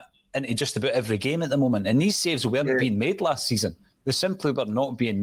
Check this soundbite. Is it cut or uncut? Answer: uncut